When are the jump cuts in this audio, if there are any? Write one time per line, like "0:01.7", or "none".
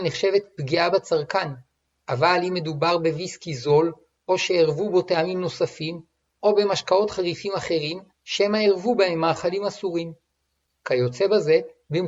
0:08.1